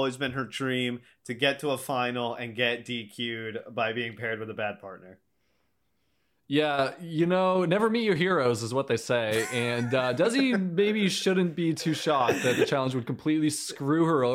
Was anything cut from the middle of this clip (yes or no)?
no